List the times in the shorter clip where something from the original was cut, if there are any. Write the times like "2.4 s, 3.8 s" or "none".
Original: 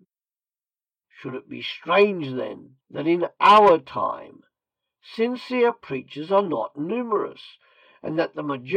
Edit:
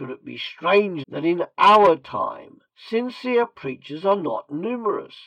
1.0 s, 2.7 s